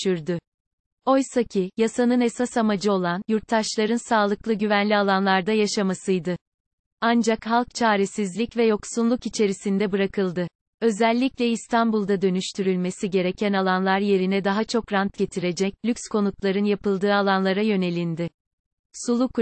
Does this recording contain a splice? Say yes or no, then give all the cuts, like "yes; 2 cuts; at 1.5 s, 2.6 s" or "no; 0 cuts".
no; 0 cuts